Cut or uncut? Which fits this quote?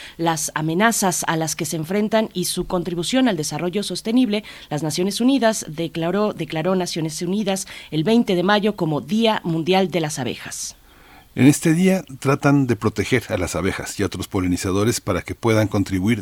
uncut